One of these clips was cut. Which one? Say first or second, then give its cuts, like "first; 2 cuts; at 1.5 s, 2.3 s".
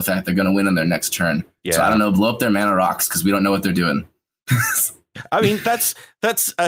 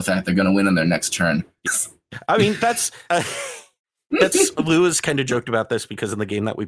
second; 2 cuts; at 1.7 s, 3.1 s